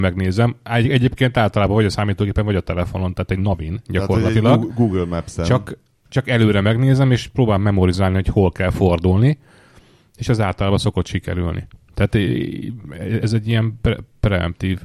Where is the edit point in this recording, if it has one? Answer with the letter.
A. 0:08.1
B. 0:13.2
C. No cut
B